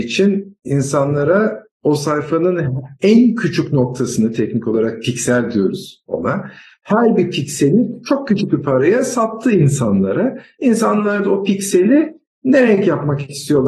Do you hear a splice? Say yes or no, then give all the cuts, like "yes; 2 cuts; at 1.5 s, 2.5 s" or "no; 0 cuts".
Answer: no; 0 cuts